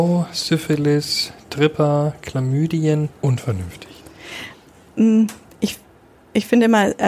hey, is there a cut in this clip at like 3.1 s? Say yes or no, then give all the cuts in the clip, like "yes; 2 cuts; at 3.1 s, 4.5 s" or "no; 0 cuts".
yes; 1 cut; at 3.1 s